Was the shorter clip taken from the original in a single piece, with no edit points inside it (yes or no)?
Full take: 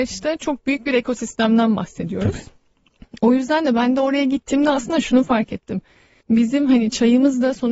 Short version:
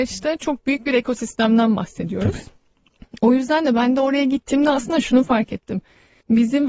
yes